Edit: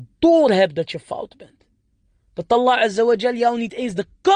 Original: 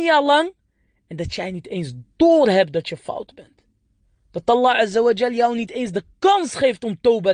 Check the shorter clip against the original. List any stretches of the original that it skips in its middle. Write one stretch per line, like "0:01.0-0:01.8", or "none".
none